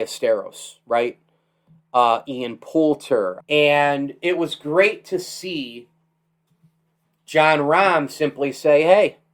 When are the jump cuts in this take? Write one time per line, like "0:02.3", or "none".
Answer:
0:03.4